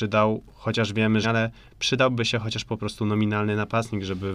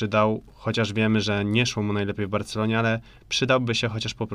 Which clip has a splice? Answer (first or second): first